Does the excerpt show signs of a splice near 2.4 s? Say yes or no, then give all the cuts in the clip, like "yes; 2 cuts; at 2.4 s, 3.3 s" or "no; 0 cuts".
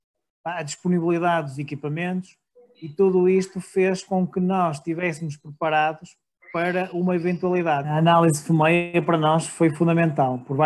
no; 1 cut; at 7.8 s